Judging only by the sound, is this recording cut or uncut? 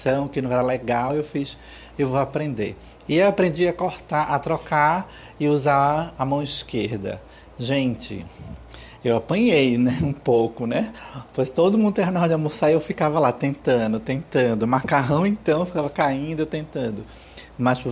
uncut